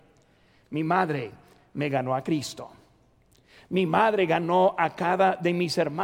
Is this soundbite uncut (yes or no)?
yes